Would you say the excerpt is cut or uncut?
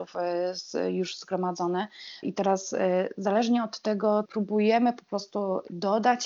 cut